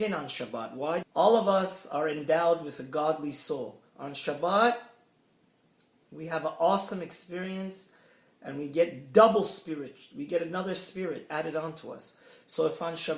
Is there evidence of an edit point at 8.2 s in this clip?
no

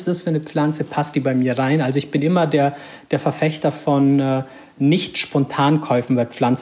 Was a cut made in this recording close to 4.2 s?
no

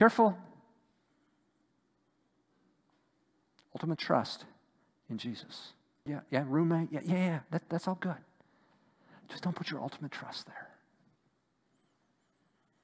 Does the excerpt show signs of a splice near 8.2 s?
no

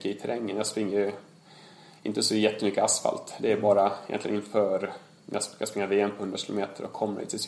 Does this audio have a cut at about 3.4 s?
no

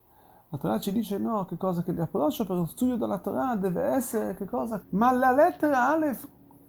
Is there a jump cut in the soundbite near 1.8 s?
no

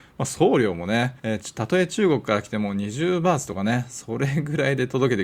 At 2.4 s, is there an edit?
no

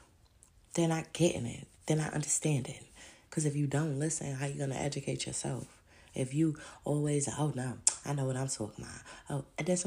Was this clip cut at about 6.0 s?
no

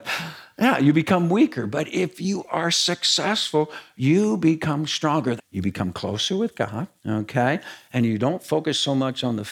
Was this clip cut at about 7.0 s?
yes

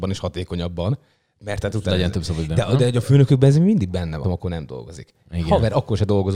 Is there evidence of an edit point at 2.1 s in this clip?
no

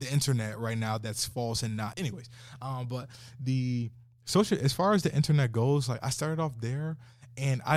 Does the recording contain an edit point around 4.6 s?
no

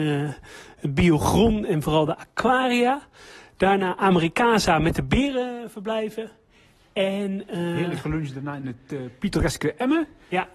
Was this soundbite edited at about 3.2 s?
no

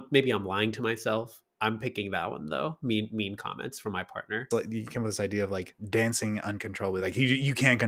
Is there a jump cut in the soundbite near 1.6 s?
no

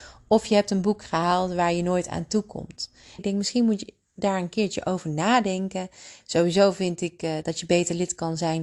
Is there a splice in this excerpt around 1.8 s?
no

